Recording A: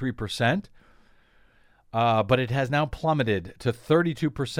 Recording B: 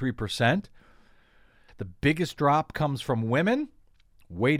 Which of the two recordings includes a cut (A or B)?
B